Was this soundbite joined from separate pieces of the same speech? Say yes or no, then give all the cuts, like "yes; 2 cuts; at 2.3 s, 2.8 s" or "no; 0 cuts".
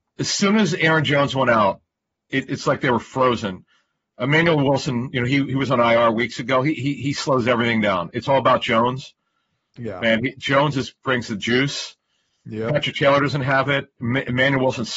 yes; 1 cut; at 2.5 s